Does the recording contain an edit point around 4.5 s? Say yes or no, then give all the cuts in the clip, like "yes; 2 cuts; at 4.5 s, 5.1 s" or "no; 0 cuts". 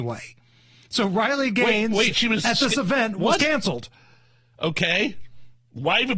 yes; 1 cut; at 4.5 s